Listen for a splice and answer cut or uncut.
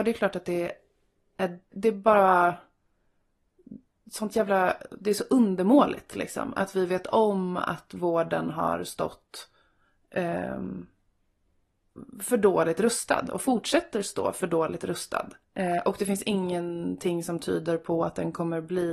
cut